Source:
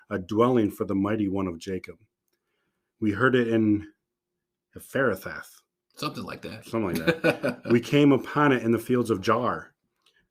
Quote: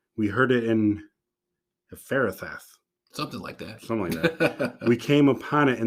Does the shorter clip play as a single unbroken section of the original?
yes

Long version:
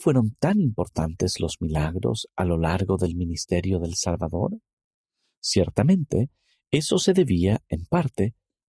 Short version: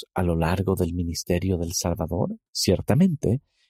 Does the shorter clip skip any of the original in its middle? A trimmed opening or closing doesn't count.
yes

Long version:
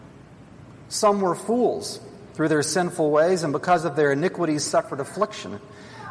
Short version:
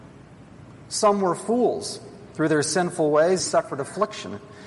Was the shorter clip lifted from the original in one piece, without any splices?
no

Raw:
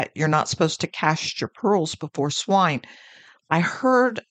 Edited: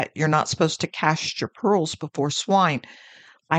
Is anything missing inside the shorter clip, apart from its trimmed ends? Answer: no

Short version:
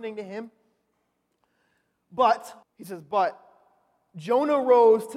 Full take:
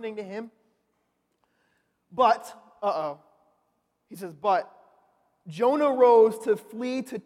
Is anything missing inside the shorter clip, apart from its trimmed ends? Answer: yes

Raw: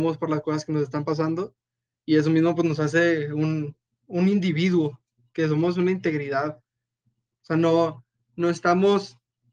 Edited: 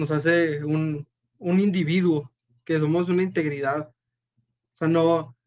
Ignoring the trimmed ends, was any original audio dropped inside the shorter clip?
no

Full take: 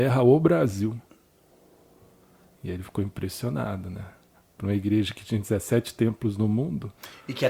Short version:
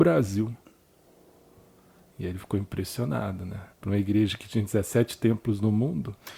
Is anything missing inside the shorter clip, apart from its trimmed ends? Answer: yes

